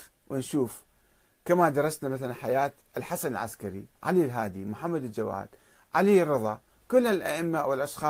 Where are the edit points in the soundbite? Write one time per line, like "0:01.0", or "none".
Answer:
0:03.9